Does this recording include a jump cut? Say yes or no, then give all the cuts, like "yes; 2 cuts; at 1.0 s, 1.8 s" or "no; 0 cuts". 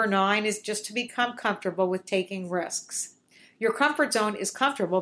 no; 0 cuts